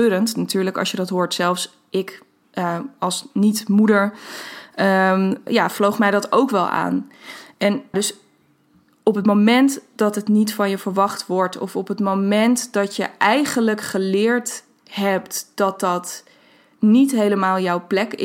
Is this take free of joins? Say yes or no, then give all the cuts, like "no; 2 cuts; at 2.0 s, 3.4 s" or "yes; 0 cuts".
no; 2 cuts; at 5.5 s, 7.9 s